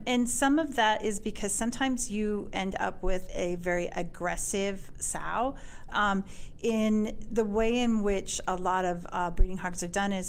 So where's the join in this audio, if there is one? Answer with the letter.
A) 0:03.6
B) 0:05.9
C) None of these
B